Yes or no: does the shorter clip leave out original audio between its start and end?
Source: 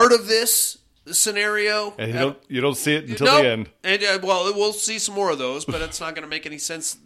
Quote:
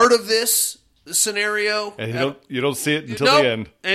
no